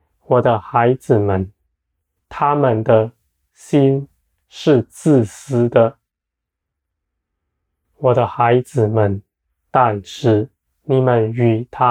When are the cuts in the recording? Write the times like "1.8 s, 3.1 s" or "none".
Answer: 2.2 s